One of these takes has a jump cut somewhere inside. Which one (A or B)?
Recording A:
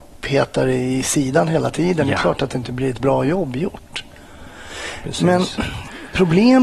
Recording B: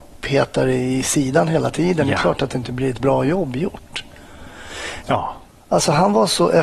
B